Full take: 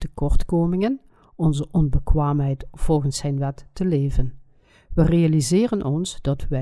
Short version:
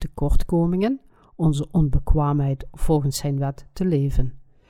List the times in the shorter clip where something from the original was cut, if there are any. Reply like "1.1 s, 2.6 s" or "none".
none